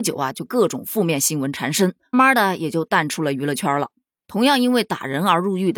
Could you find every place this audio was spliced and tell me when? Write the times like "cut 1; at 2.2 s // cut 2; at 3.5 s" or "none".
cut 1; at 2.1 s